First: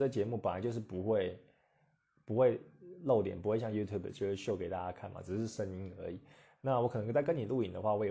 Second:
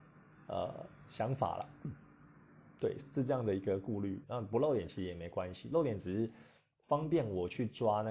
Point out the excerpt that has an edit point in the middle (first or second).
second